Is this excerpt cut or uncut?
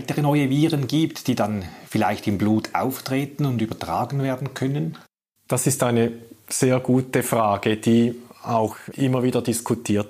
uncut